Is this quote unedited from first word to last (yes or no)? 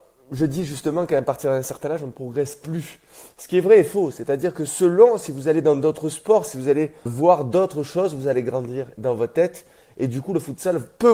no